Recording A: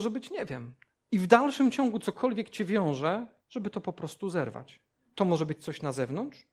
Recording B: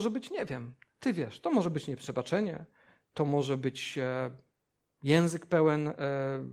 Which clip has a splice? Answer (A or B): A